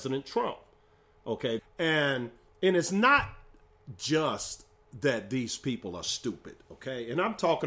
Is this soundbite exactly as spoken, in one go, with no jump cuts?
no; 1 cut; at 1.6 s

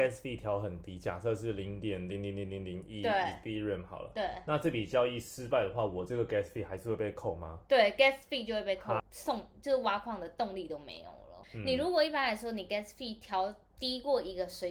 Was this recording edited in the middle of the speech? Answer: yes; 2 cuts; at 9.0 s, 11.4 s

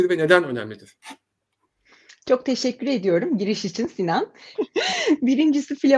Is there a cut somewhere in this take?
yes; 1 cut; at 4.5 s

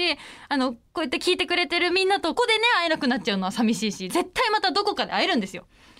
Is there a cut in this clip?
yes; 2 cuts; at 2.4 s, 4.1 s

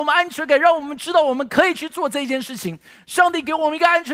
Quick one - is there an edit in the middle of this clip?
no; 0 cuts

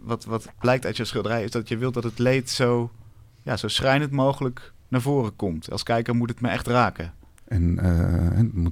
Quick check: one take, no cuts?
no; 1 cut; at 7.4 s

